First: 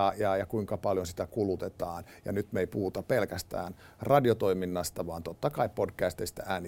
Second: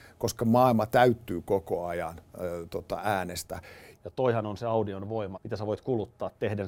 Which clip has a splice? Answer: second; 2 cuts; at 3.9 s, 5.3 s

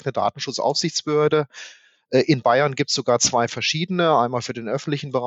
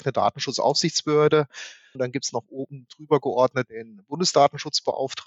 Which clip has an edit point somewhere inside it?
second; 2 cuts; at 1.9 s, 3.7 s

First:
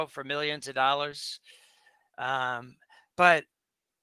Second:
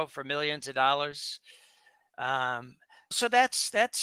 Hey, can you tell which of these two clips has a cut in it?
second; 1 cut; at 3.1 s

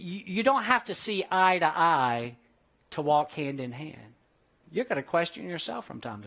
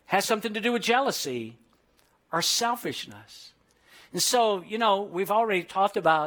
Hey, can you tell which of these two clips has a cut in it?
first; 1 cut; at 4.6 s

